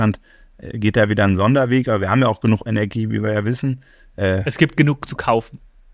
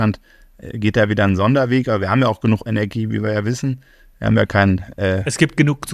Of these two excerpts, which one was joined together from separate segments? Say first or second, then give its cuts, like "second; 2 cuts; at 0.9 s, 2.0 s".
first; 1 cut; at 4.1 s